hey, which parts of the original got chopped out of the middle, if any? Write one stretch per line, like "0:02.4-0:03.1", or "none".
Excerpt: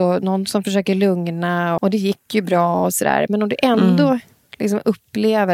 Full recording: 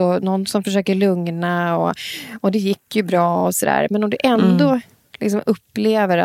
0:01.8-0:02.4